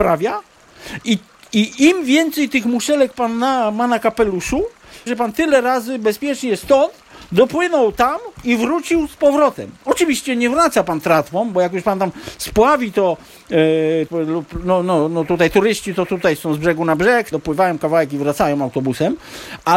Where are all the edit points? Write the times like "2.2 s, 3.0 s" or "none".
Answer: 5.1 s, 14.1 s, 17.3 s